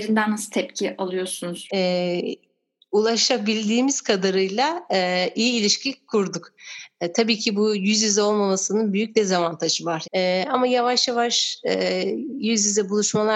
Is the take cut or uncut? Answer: cut